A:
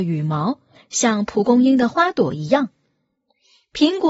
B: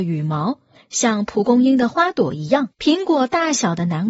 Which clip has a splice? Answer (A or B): B